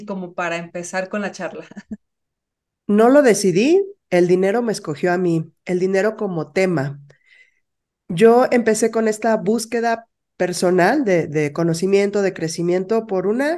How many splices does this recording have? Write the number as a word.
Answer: zero